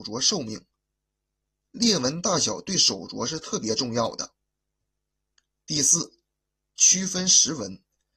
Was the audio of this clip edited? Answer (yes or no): no